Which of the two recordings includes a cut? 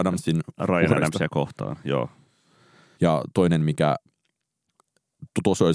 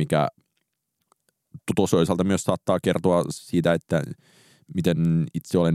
first; 1 cut; at 2.9 s

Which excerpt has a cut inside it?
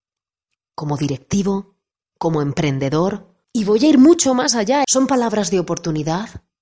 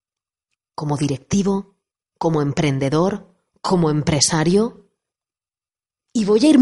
first; 2 cuts; at 3.4 s, 4.8 s

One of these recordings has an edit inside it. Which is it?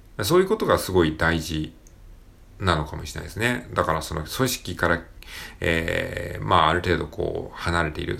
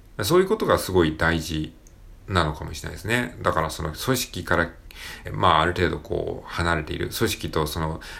second; 2 cuts; at 2.2 s, 5.2 s

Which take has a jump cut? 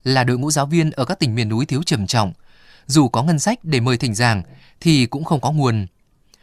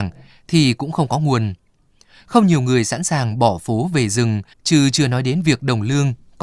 second; 1 cut; at 4.5 s

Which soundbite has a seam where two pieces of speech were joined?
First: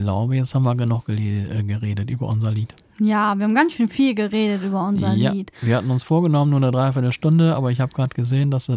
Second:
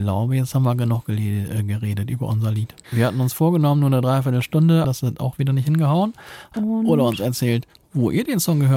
second; 3 cuts; at 2.8 s, 4.8 s, 6.5 s

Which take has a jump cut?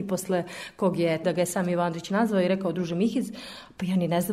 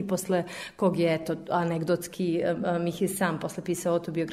first; 1 cut; at 1.2 s

